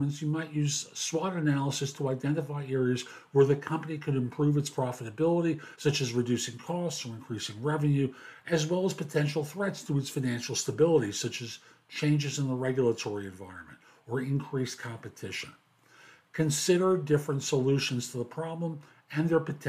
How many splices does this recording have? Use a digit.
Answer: 0